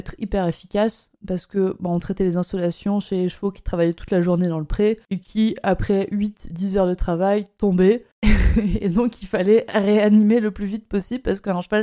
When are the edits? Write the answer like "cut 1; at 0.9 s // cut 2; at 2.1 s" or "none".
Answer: none